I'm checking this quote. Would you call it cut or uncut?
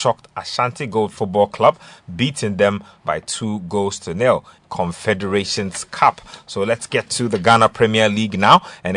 cut